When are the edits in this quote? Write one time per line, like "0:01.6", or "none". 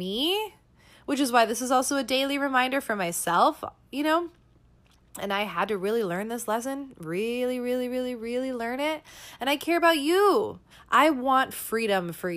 0:10.7